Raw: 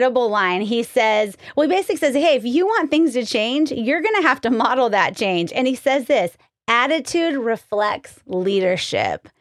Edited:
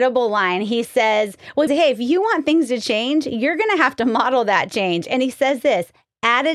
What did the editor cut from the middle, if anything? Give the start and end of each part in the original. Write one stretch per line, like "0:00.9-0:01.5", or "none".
0:01.7-0:02.1